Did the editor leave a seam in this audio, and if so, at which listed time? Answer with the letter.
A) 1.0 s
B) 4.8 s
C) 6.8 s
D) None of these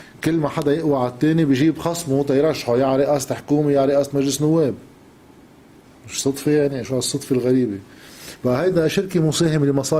C